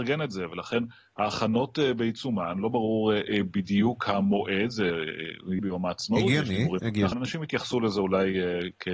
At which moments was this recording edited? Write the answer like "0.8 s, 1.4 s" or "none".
5.6 s, 7.1 s